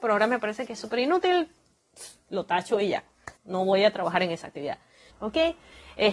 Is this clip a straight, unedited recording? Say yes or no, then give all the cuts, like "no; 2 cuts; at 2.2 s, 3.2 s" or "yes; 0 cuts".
no; 2 cuts; at 3.4 s, 5.1 s